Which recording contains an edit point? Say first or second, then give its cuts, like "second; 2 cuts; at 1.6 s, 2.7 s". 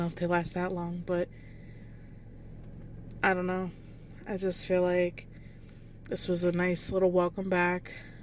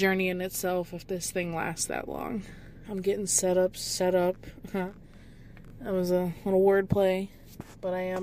second; 1 cut; at 2.8 s